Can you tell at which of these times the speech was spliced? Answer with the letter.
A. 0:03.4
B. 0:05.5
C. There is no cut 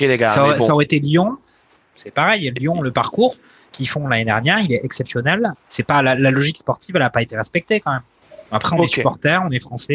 B